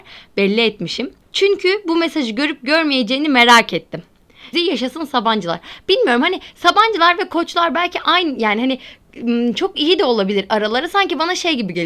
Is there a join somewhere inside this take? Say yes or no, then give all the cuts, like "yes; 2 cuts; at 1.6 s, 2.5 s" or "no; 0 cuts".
yes; 2 cuts; at 1.2 s, 4.5 s